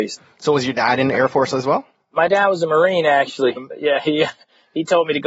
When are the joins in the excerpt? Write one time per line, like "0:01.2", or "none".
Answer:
0:03.6